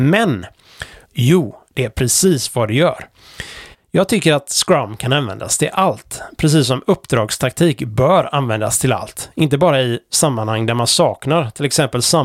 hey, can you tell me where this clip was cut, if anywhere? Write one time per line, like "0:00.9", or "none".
0:01.0
0:03.7